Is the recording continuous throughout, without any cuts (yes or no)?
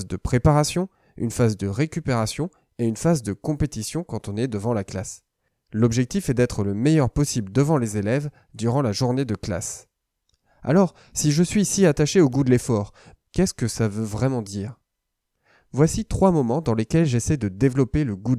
no